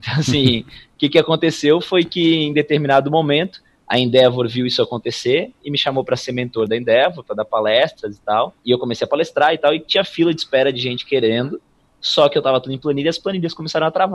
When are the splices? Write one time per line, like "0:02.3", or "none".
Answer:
0:08.6